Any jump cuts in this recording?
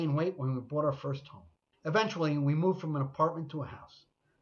yes; 1 cut; at 1.7 s

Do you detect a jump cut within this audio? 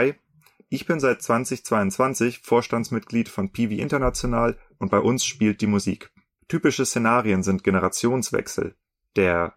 yes; 1 cut; at 6.4 s

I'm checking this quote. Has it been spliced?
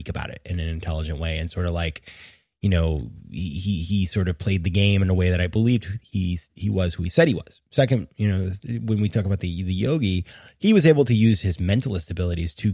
no; 0 cuts

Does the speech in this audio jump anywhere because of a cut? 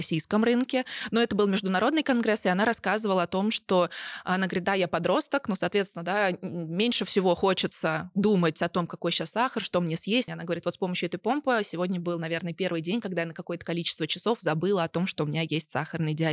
no; 0 cuts

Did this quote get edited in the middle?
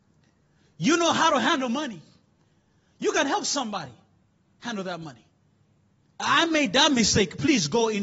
yes; 1 cut; at 6.2 s

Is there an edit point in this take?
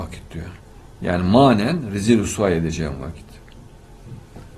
no; 0 cuts

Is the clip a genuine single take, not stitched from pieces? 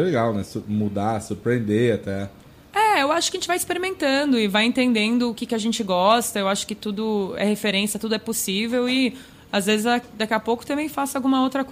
yes; 0 cuts

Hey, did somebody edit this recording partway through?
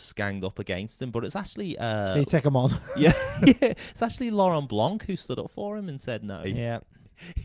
yes; 1 cut; at 6.4 s

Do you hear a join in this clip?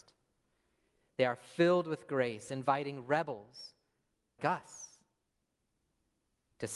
yes; 1 cut; at 4.4 s

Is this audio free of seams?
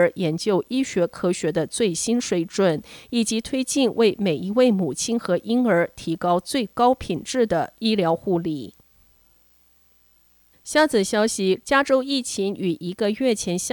no; 1 cut; at 11.6 s

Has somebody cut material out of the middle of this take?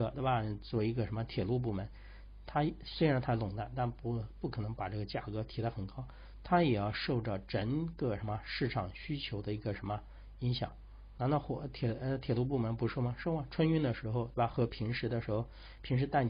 no; 0 cuts

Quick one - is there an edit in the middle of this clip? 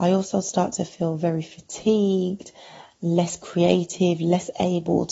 no; 0 cuts

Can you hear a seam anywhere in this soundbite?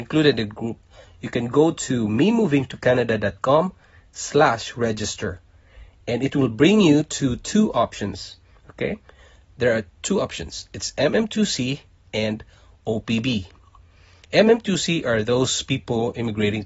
no; 0 cuts

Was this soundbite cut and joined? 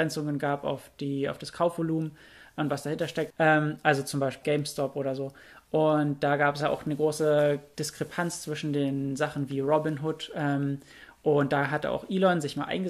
yes; 2 cuts; at 3.3 s, 4.4 s

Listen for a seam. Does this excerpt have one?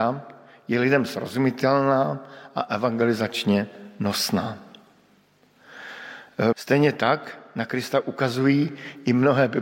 yes; 1 cut; at 6.5 s

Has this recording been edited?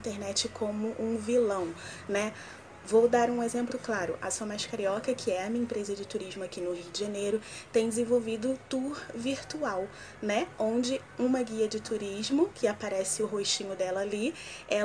yes; 1 cut; at 3.7 s

